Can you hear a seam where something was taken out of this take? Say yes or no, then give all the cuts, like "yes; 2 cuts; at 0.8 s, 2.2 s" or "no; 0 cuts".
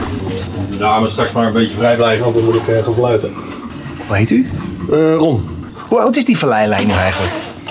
no; 0 cuts